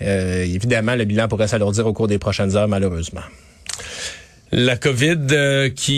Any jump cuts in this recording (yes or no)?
no